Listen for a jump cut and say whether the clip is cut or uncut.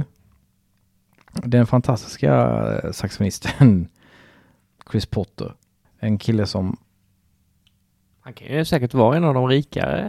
cut